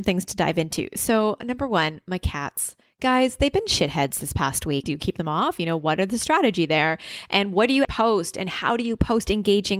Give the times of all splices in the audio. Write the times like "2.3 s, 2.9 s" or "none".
4.8 s, 7.8 s